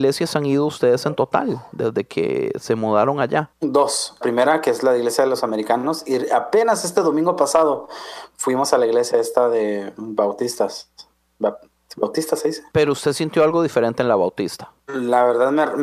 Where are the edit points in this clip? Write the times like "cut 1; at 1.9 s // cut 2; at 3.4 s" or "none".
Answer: cut 1; at 4.2 s